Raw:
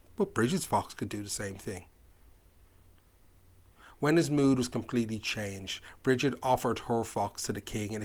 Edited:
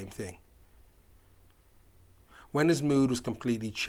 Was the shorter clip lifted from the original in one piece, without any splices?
yes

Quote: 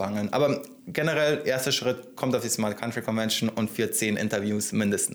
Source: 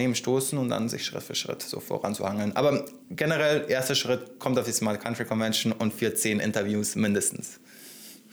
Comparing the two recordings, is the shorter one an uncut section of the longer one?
yes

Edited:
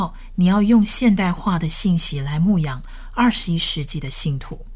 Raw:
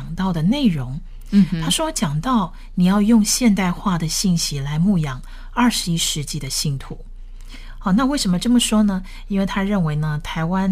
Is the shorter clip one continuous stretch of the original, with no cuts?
yes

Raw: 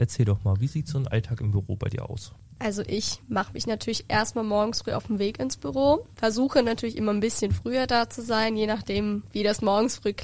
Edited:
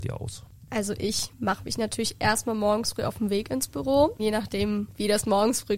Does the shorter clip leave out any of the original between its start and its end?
yes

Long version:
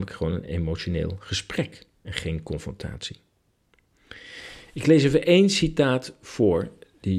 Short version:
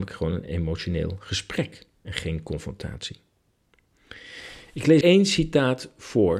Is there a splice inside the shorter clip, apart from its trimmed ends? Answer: yes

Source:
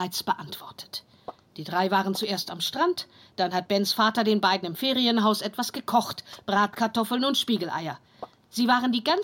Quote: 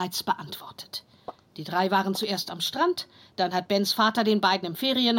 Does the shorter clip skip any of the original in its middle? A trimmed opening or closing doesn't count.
no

